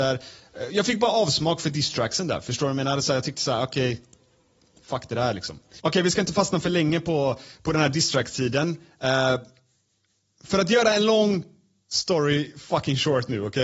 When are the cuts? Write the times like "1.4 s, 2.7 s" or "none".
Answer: none